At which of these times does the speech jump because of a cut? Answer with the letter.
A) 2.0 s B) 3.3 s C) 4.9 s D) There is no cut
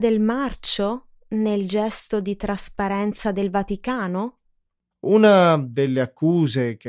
C